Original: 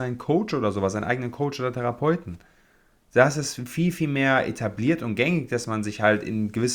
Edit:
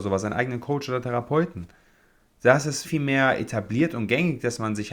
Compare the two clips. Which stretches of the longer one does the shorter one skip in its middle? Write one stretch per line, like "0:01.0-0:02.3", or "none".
0:03.6-0:03.9